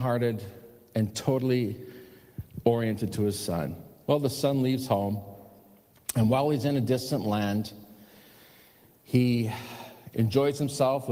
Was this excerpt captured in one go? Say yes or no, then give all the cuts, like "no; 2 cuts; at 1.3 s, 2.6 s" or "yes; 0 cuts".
yes; 0 cuts